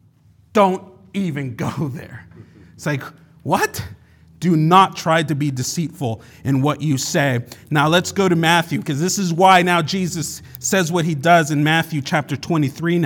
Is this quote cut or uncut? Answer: uncut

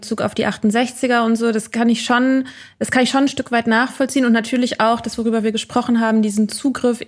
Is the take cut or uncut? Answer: uncut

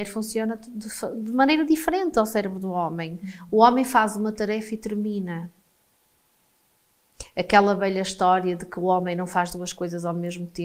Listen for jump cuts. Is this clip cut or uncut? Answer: uncut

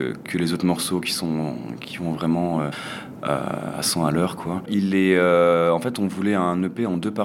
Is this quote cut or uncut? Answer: cut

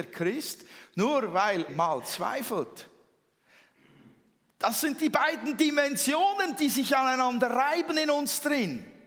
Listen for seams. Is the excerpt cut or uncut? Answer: cut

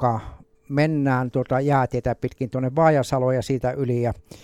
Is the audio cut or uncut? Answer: uncut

